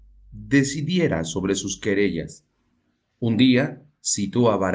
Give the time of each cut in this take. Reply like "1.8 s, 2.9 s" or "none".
none